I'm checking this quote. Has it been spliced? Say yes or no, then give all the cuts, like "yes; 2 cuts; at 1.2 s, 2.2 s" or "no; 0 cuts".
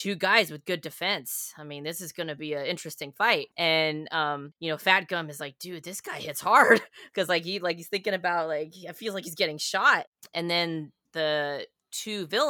no; 0 cuts